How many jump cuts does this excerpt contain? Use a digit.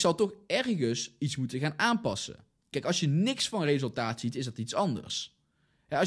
1